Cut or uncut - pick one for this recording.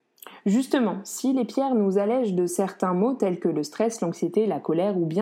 uncut